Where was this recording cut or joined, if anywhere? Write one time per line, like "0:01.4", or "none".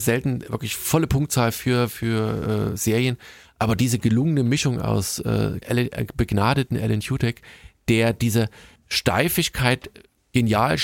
0:05.6